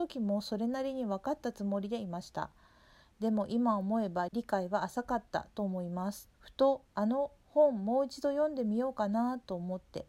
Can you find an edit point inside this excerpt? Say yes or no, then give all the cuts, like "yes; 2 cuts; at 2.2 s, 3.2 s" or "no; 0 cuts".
yes; 2 cuts; at 4.3 s, 6.3 s